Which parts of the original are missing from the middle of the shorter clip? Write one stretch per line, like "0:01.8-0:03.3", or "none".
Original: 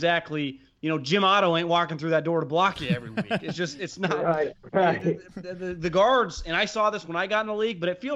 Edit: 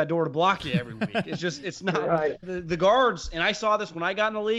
0:04.6-0:05.6